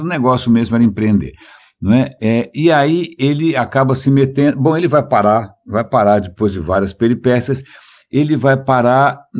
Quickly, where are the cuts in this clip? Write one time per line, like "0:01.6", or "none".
none